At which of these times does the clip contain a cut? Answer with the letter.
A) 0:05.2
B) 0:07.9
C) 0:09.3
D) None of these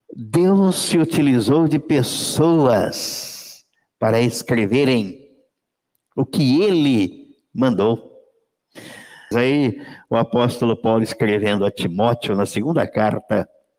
C